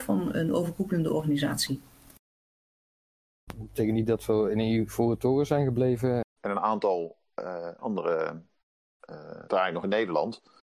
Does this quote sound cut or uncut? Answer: cut